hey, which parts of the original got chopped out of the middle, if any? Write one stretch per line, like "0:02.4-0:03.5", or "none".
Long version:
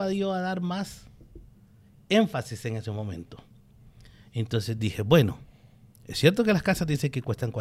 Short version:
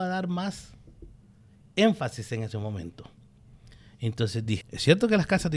0:04.9-0:06.0